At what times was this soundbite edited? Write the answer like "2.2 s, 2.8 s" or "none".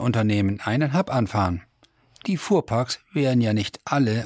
none